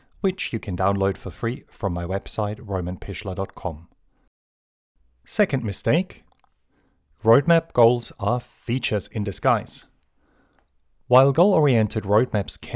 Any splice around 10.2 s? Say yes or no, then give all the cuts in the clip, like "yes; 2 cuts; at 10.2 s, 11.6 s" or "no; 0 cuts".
no; 0 cuts